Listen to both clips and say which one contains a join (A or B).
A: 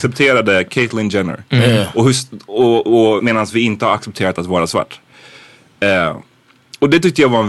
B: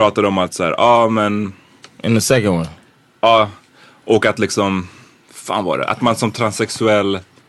A